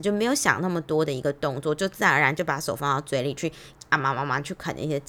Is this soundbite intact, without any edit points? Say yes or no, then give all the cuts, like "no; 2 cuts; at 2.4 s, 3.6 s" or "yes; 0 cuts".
yes; 0 cuts